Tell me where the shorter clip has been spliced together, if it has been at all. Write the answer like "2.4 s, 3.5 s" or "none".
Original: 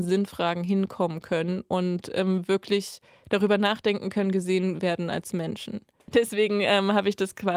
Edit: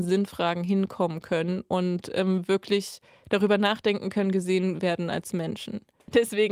none